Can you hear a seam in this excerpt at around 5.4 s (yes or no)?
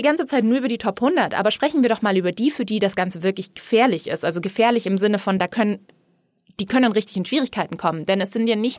no